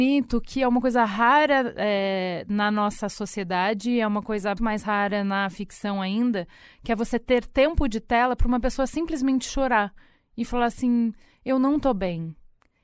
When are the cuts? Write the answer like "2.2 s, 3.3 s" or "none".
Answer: 4.6 s

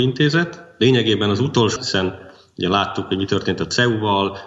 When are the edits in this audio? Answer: 1.8 s

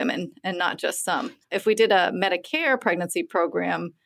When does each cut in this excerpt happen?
1.4 s

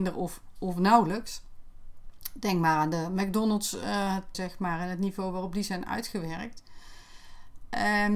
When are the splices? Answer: 4.3 s

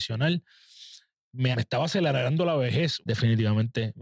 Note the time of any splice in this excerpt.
1.5 s, 3.0 s

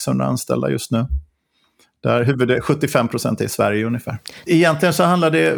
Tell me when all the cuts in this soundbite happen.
4.5 s

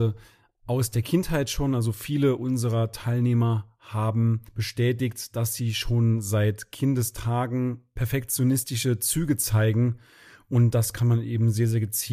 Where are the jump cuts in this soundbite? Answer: 4.5 s

